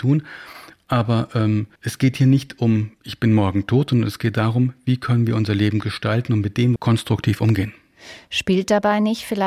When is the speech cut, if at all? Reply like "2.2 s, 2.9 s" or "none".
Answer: 1.8 s, 6.8 s